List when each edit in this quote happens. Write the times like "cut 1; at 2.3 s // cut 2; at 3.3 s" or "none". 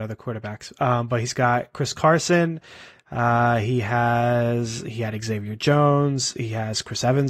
none